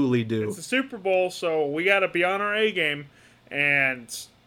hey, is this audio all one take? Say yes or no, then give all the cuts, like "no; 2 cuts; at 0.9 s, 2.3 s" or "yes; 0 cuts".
yes; 0 cuts